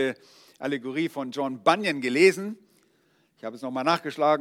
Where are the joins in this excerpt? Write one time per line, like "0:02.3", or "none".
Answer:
none

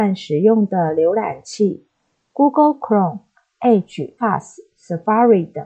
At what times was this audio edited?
0:04.2

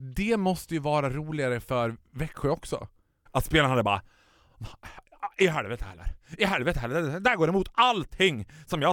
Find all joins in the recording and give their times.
0:03.3

